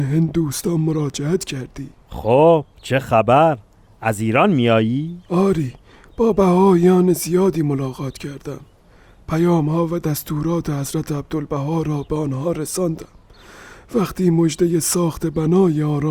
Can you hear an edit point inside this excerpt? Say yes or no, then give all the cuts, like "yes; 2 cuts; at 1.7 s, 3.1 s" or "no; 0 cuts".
no; 0 cuts